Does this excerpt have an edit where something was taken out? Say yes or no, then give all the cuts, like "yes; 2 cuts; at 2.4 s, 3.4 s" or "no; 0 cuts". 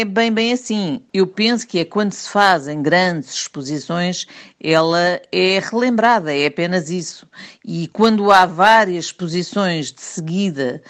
no; 0 cuts